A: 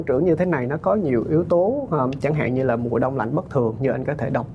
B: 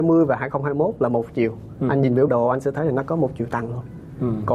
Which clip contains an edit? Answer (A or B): B